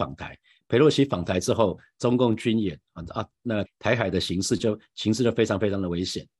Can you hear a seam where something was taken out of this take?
yes; 1 cut; at 3.6 s

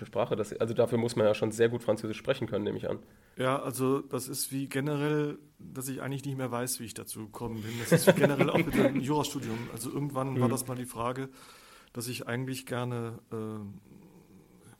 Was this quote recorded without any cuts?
yes; 0 cuts

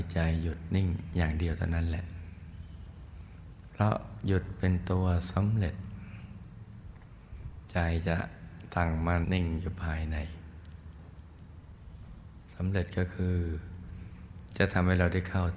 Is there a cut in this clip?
yes; 1 cut; at 9.2 s

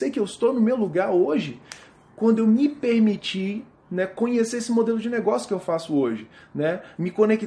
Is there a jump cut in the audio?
no; 0 cuts

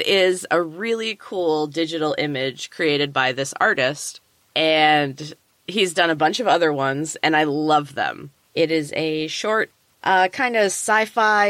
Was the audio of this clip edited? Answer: yes; 1 cut; at 8.3 s

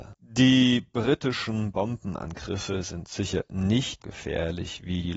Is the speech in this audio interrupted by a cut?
yes; 1 cut; at 4.0 s

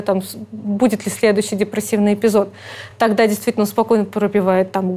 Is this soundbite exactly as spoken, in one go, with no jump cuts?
yes; 0 cuts

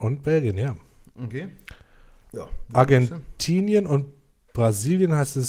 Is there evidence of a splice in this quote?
no; 0 cuts

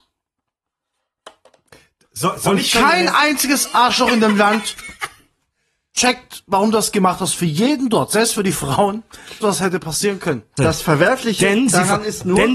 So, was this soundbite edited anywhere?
yes; 2 cuts; at 9.4 s, 10.6 s

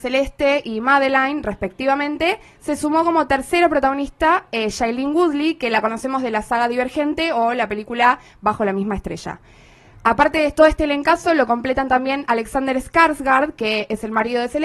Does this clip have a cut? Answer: no; 0 cuts

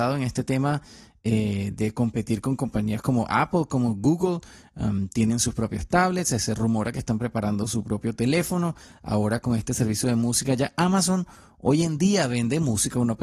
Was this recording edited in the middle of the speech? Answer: no; 0 cuts

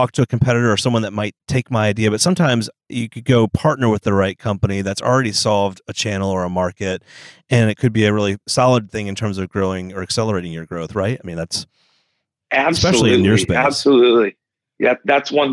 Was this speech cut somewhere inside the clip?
no; 0 cuts

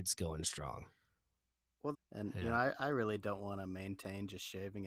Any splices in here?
yes; 1 cut; at 1.9 s

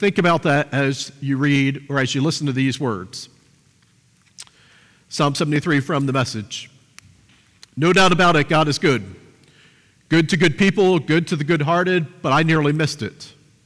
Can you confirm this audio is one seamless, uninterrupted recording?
yes; 0 cuts

